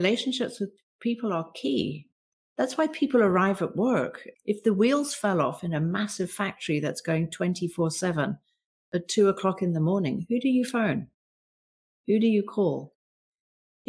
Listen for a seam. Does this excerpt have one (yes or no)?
yes